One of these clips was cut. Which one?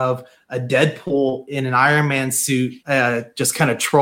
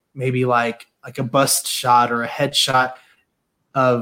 first; 1 cut; at 2.8 s

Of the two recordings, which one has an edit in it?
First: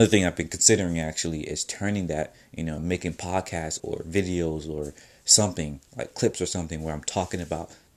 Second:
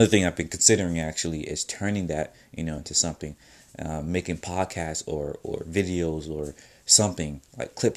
first; 2 cuts; at 2.8 s, 3.8 s

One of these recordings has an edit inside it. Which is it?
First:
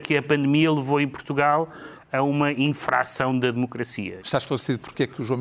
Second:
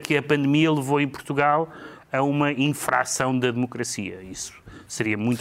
first; 1 cut; at 4.2 s

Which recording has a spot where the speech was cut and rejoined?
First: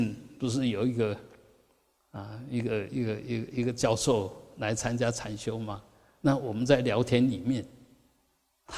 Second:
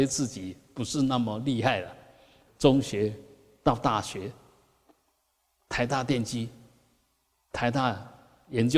second; 1 cut; at 2.5 s

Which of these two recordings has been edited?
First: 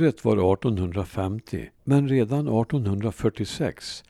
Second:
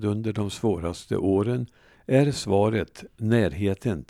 first; 1 cut; at 1.7 s

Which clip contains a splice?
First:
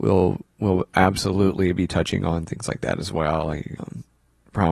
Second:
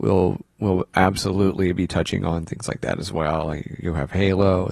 first; 1 cut; at 3.8 s

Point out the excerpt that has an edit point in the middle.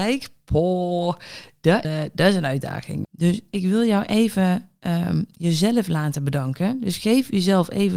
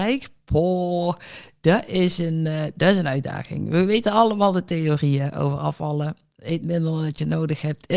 first; 2 cuts; at 1.8 s, 3.0 s

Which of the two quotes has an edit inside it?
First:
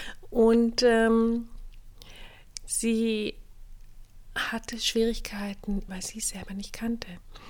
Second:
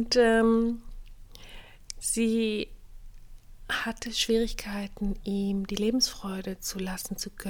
first; 1 cut; at 5.9 s

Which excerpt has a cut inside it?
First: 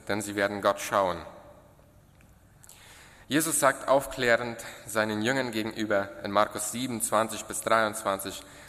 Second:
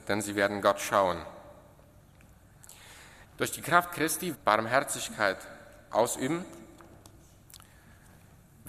second; 2 cuts; at 3.2 s, 4.3 s

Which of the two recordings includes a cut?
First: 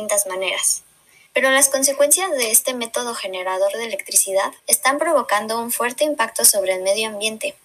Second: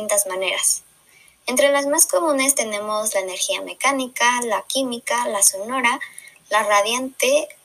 first; 2 cuts; at 1.3 s, 4.6 s

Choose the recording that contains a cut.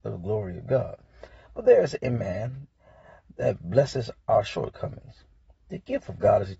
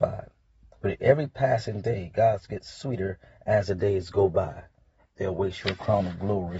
second; 1 cut; at 5.0 s

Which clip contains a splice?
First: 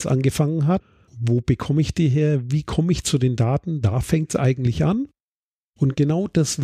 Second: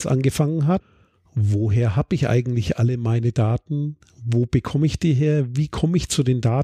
first; 1 cut; at 1.1 s

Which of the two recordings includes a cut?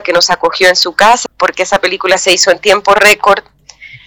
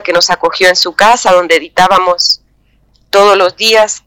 first; 1 cut; at 1.3 s

